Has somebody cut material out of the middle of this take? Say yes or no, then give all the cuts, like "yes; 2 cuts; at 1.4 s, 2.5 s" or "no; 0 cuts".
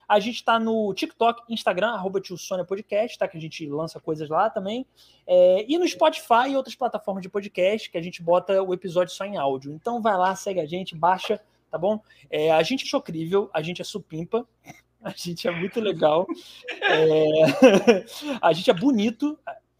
yes; 1 cut; at 12.8 s